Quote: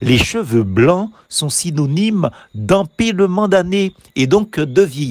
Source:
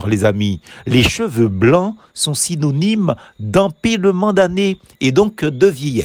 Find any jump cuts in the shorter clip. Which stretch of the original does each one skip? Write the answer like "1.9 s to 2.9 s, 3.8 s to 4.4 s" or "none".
none